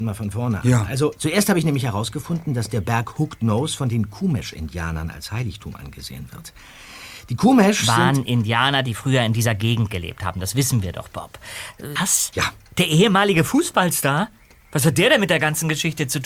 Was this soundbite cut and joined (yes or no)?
yes